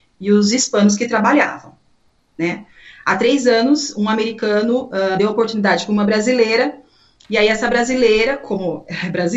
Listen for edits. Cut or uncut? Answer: uncut